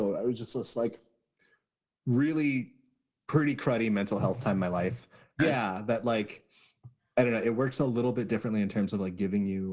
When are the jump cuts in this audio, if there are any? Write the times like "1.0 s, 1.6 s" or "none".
5.4 s